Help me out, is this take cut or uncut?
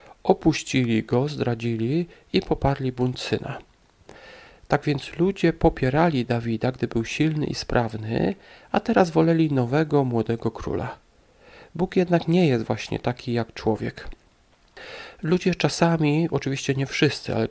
uncut